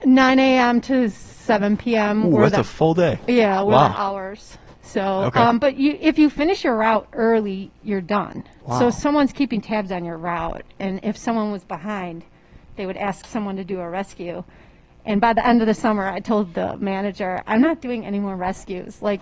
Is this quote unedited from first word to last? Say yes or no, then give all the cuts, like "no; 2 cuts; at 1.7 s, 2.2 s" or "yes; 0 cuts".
no; 1 cut; at 8.6 s